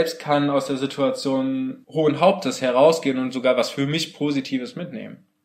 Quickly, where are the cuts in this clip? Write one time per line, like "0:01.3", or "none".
none